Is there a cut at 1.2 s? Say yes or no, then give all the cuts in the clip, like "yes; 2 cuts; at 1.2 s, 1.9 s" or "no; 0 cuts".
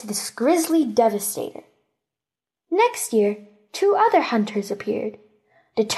no; 1 cut; at 2.6 s